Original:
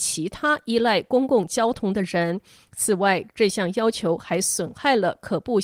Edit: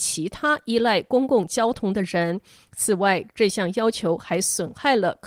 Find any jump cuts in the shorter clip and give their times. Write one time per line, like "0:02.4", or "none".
none